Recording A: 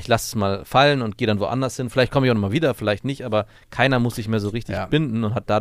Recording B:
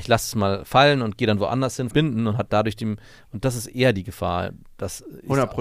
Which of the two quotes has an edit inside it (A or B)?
B